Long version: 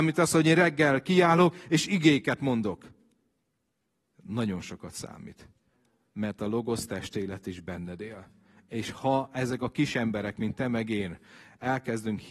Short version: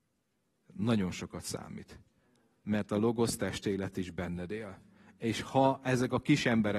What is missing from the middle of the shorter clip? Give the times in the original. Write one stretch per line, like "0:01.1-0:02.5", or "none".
none